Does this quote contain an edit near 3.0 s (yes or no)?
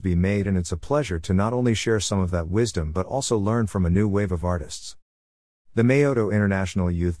no